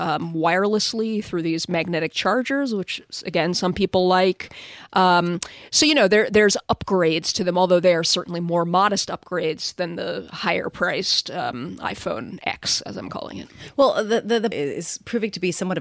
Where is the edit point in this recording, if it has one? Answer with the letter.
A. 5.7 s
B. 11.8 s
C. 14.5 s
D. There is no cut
C